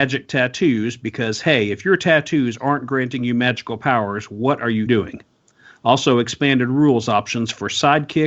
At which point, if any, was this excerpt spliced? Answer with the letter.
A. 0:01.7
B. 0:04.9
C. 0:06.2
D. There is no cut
B